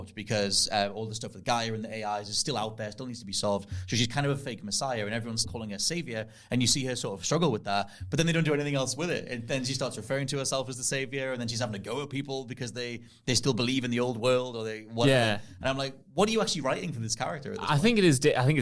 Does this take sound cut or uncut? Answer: cut